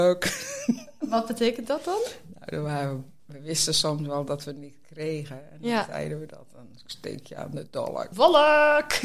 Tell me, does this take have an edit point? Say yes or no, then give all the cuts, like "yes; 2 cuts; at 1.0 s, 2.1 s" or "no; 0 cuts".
yes; 2 cuts; at 3.2 s, 8.1 s